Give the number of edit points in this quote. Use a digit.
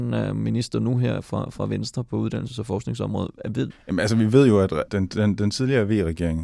2